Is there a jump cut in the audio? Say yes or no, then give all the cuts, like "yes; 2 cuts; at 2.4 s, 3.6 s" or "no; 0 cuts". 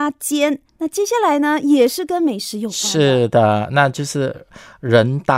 no; 0 cuts